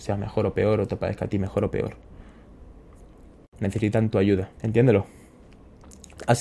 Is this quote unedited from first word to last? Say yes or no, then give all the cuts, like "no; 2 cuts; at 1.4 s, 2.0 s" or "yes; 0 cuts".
no; 1 cut; at 4.6 s